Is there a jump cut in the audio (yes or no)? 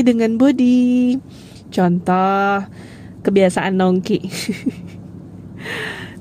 yes